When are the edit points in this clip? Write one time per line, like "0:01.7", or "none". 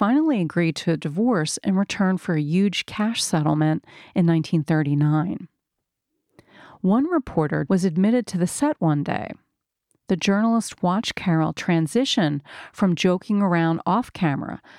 0:07.7